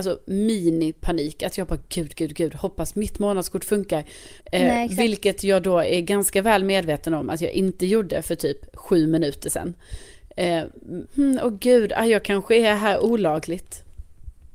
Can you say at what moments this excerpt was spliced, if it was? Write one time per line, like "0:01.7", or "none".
0:04.4
0:11.1